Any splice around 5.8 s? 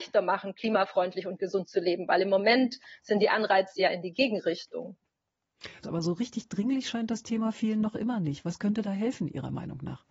yes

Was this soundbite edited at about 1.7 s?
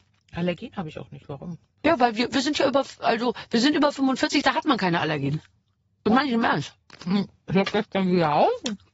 no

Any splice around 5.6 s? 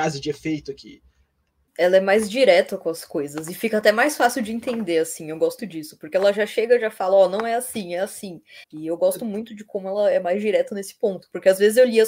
yes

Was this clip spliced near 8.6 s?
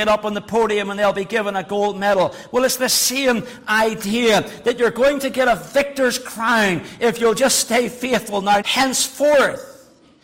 yes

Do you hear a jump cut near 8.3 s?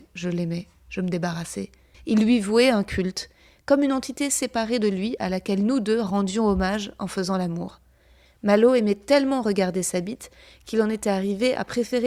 no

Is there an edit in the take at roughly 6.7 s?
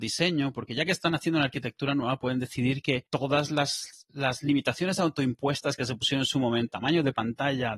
yes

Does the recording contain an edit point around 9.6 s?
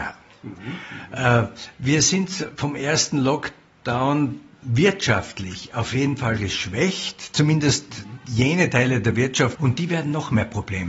yes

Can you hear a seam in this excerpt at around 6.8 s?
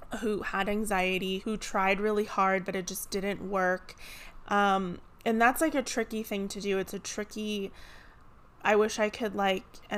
no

